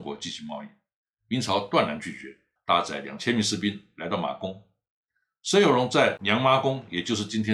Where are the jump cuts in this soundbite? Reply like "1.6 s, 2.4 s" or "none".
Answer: 2.6 s